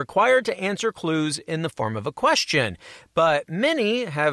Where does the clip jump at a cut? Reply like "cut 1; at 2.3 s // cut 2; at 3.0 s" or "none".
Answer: none